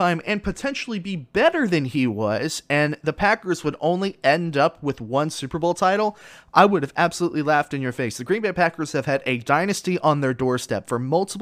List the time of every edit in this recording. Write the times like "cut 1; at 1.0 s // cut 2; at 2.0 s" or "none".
none